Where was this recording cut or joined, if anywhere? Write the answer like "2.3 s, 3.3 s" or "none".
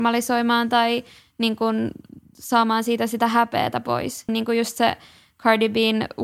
4.3 s